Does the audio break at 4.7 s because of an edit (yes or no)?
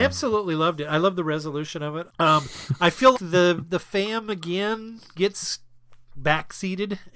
no